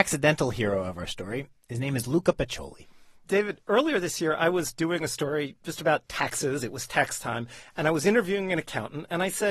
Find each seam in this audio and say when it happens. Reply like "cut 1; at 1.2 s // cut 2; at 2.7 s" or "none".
none